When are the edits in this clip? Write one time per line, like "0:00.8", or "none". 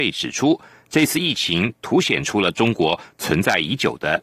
none